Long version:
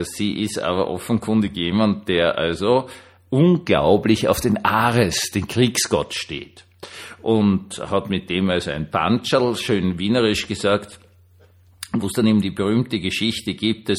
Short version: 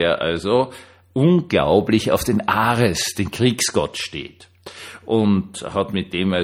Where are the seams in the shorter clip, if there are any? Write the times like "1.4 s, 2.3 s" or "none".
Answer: none